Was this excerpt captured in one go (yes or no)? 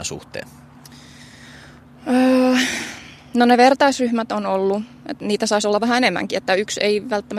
yes